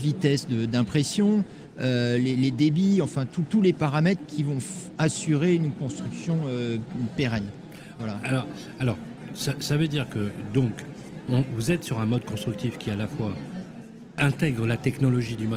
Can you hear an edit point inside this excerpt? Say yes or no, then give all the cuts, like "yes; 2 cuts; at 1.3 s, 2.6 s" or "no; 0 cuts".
no; 0 cuts